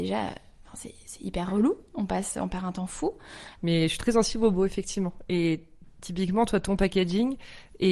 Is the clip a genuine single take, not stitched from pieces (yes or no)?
no